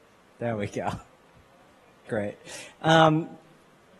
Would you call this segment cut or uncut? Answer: cut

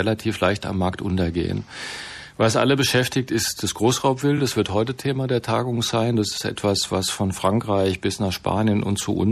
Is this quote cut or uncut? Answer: uncut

